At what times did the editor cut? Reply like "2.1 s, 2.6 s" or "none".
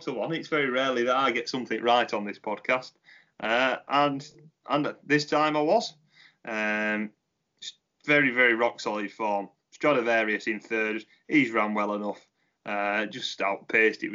none